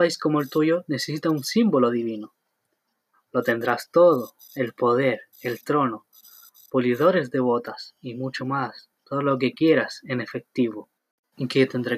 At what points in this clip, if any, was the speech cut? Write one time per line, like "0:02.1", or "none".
none